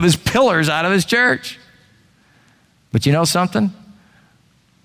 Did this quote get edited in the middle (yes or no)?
no